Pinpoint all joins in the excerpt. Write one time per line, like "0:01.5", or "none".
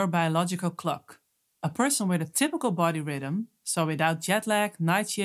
none